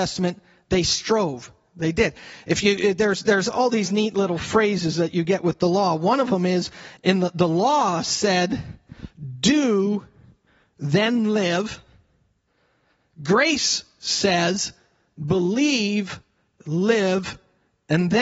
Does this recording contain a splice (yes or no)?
no